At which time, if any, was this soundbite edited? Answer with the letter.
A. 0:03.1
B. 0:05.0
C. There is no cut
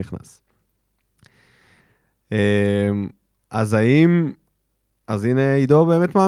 C